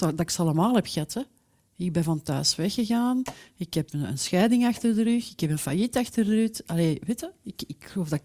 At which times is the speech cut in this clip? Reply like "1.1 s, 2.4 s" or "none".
none